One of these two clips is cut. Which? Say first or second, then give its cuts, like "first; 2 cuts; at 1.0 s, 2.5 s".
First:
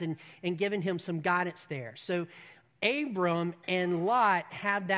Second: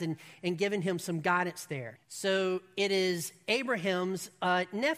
second; 1 cut; at 1.9 s